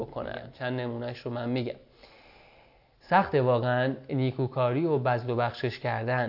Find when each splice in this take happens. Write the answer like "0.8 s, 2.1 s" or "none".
none